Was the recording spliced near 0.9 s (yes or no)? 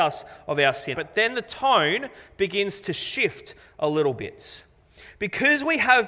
yes